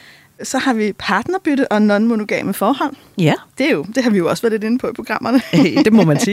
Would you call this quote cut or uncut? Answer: uncut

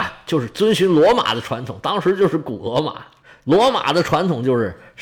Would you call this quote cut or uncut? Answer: uncut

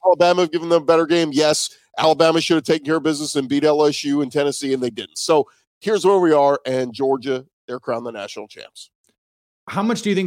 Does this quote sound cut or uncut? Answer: uncut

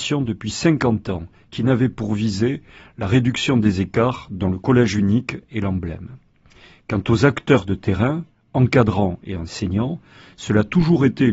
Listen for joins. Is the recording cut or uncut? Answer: uncut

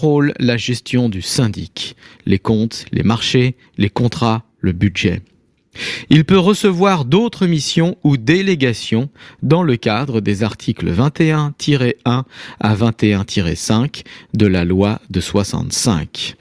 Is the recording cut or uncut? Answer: uncut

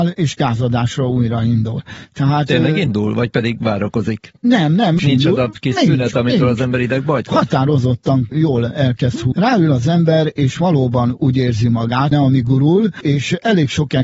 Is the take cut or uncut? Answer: cut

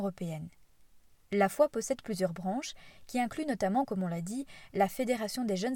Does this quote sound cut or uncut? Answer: uncut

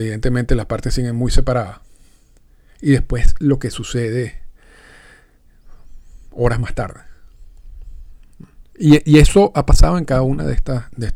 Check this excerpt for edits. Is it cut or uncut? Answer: uncut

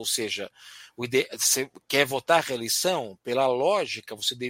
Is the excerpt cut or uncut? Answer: uncut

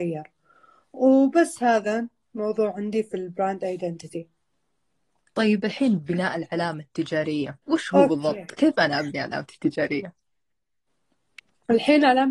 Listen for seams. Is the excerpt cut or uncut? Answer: cut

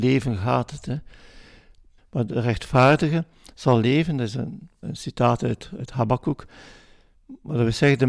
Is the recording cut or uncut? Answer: cut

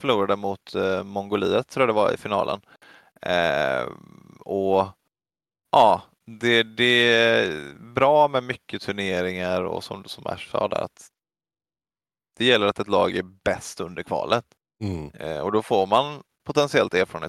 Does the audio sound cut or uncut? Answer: uncut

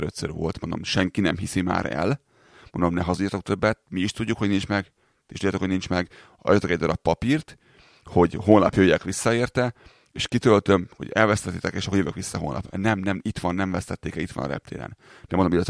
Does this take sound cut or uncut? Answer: uncut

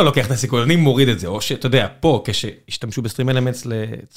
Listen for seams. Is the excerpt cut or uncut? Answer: uncut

